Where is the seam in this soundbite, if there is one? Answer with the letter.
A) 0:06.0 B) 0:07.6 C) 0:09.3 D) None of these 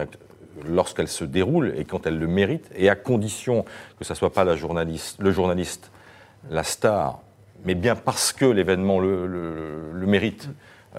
D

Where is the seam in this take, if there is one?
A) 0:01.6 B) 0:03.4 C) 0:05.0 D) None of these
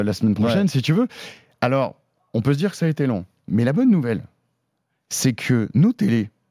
D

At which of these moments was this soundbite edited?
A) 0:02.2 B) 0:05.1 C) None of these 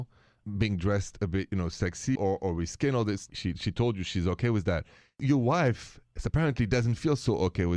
A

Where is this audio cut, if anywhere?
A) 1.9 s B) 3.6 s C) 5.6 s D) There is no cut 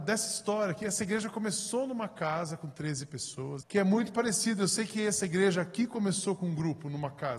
B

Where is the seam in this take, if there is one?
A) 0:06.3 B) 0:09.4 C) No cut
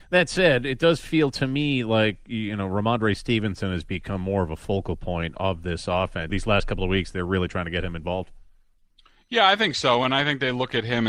A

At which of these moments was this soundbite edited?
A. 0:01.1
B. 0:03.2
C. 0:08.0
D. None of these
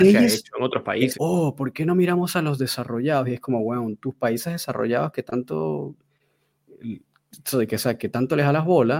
A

